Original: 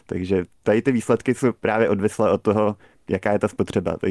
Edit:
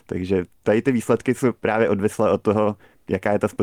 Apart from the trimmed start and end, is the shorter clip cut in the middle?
no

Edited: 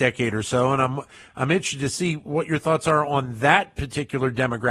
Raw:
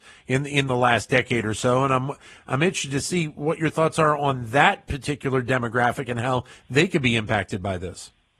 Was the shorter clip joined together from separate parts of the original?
no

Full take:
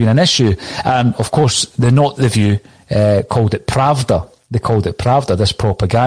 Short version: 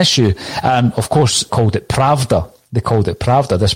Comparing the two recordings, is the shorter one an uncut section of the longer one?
no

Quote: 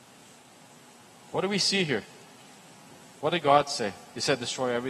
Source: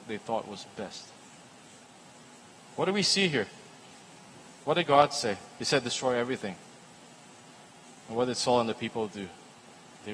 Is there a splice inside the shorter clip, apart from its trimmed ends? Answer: no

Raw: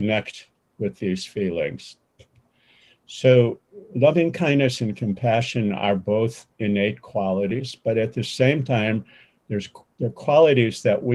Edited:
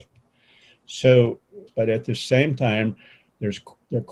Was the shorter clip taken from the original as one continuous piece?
no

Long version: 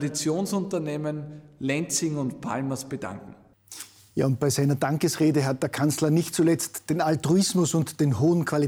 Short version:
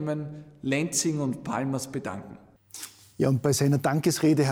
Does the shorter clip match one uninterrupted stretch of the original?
yes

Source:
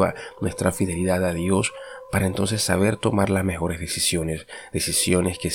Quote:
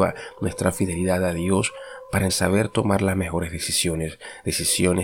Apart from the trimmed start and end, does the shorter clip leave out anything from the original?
yes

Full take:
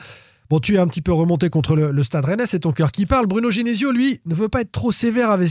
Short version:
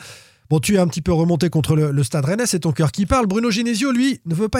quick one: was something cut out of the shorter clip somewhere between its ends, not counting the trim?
no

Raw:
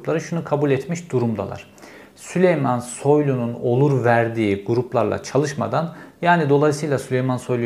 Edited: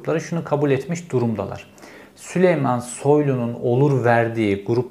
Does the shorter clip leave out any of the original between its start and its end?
no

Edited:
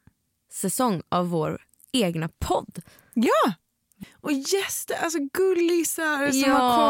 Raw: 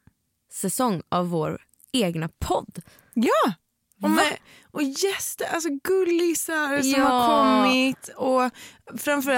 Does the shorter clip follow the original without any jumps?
no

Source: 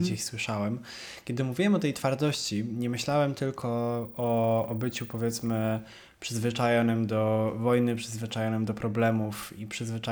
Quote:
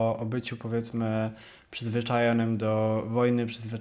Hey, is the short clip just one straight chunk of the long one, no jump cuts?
yes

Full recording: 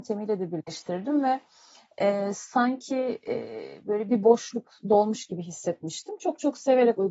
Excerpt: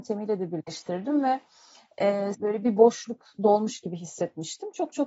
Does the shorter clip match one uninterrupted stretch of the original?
no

